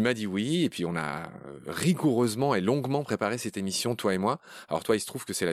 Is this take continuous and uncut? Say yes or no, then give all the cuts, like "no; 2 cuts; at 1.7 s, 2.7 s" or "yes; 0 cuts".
yes; 0 cuts